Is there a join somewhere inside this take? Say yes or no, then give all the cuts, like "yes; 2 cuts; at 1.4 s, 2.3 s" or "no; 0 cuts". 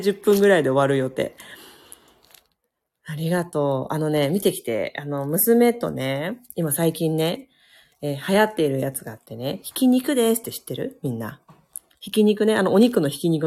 no; 0 cuts